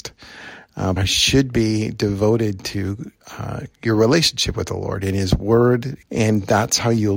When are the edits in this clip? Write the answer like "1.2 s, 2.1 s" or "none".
1.0 s, 6.0 s